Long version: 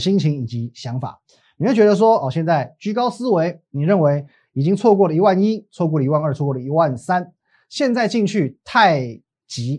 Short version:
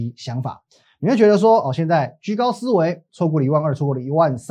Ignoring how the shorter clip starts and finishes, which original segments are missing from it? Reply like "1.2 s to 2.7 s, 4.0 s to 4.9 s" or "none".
3.7 s to 5.7 s